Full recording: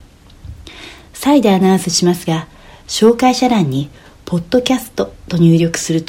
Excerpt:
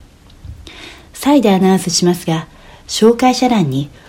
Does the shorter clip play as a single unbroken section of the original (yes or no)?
yes